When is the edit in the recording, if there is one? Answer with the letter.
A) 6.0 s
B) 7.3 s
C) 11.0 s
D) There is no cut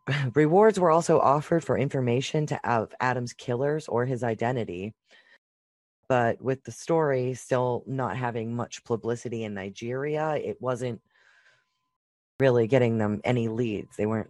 D